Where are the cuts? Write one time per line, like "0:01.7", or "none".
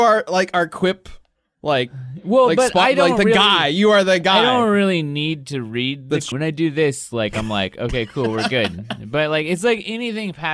0:06.3